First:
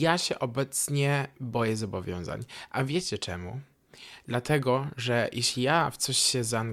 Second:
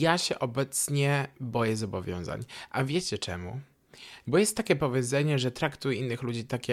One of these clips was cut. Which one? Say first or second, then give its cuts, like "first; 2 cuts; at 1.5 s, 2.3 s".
second; 1 cut; at 4.2 s